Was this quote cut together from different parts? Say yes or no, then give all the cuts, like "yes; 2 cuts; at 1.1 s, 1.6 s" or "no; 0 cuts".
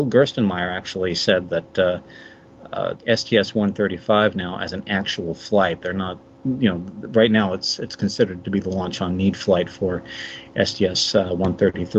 yes; 1 cut; at 2.9 s